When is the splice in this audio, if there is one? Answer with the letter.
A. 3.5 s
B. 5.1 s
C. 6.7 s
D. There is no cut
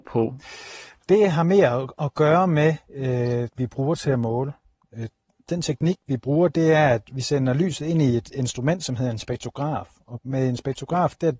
A